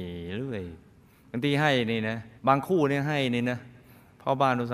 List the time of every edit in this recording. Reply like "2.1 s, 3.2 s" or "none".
2.4 s